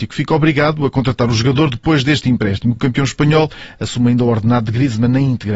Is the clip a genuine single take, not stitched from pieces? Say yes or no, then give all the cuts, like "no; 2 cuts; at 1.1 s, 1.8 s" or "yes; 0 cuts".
yes; 0 cuts